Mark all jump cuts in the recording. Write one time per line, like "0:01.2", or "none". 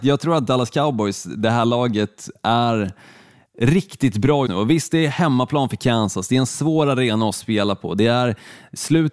0:04.5